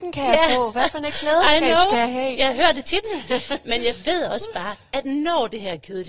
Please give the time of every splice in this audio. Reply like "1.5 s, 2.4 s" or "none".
none